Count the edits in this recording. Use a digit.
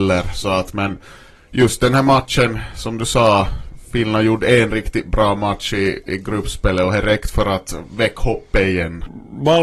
0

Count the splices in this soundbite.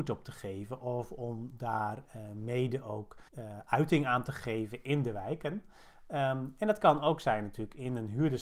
1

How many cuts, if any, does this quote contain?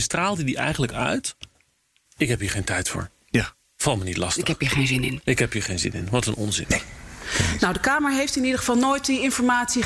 1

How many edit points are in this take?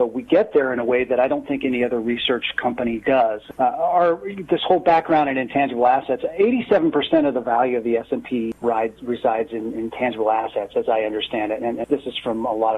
1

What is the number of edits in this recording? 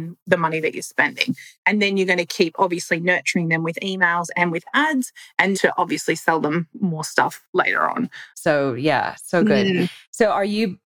2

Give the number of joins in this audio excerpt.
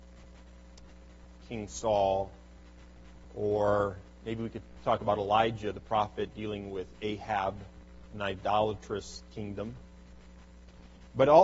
1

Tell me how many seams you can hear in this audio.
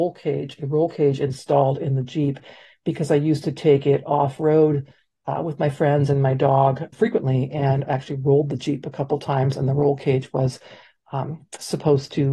1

